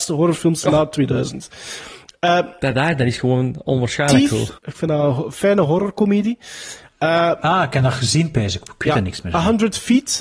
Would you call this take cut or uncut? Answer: cut